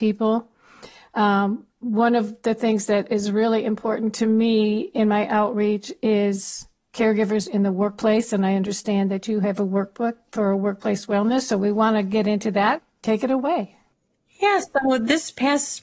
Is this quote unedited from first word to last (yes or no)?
yes